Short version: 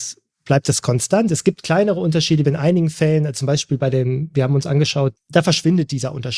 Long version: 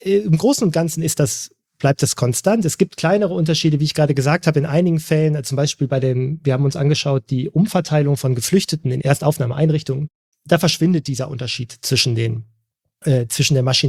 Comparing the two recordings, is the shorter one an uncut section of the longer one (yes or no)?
no